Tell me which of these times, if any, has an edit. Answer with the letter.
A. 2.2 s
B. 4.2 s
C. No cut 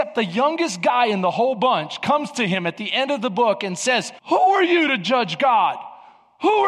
B